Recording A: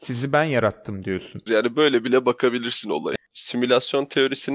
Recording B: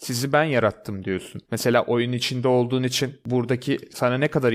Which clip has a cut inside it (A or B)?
A